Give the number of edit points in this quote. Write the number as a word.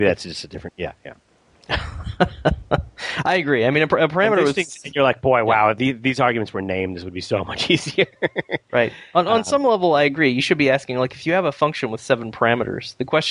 one